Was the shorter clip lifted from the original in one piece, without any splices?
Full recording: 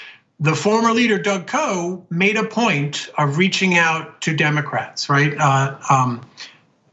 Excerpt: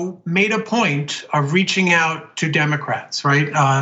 yes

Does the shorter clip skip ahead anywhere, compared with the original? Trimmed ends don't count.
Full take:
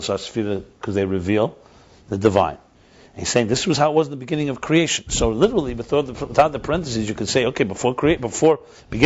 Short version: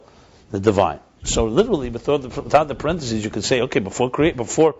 yes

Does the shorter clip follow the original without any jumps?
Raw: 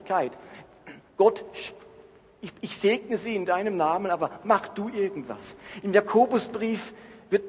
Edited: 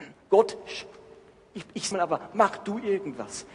no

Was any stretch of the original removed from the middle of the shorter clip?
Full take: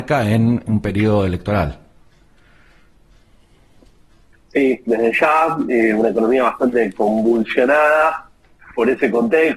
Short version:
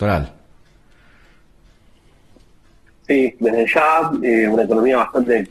no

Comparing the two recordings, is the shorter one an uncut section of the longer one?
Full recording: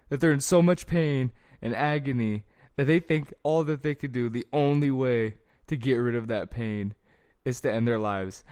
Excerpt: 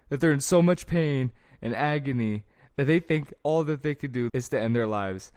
no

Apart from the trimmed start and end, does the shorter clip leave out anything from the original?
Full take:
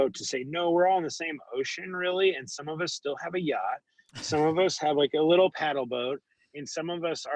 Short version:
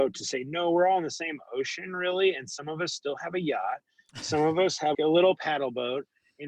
yes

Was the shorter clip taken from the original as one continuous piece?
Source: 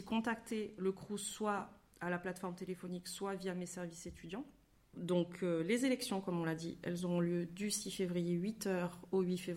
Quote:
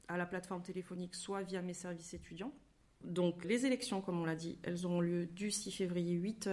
no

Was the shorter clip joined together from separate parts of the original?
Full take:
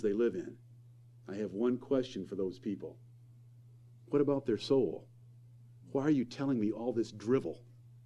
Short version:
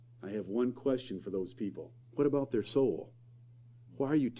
yes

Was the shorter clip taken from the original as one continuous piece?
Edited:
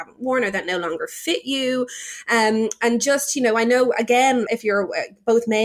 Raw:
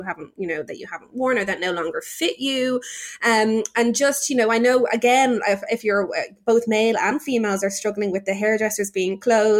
no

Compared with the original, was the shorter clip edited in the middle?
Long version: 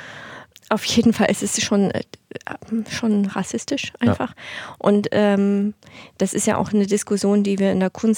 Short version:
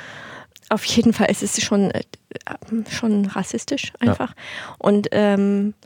no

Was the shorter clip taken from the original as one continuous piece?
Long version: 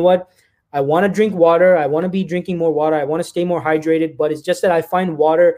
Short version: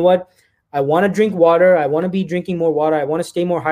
yes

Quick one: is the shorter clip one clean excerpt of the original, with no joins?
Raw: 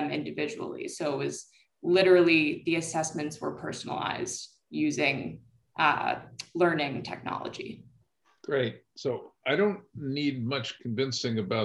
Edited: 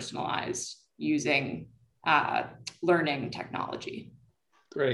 yes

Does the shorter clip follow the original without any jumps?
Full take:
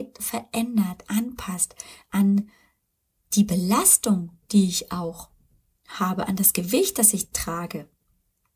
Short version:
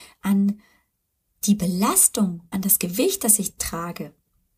no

